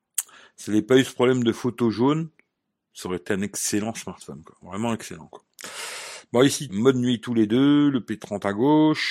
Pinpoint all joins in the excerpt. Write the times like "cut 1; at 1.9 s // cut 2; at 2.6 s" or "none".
cut 1; at 6.7 s